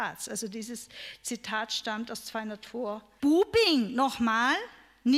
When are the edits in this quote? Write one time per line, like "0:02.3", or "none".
0:03.2